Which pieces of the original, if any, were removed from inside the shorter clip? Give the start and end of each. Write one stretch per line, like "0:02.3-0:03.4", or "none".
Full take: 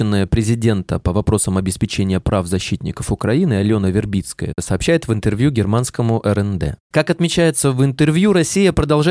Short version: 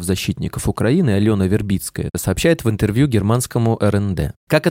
none